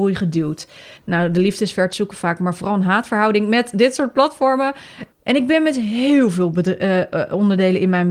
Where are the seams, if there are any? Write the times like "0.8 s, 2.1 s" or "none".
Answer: 1.0 s, 5.1 s